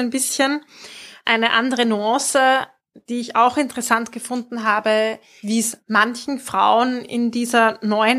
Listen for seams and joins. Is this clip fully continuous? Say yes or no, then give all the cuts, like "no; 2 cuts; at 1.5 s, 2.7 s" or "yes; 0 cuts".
no; 2 cuts; at 1.2 s, 5.4 s